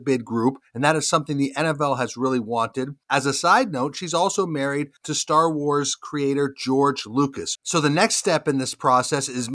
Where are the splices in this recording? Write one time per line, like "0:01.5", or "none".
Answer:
0:07.6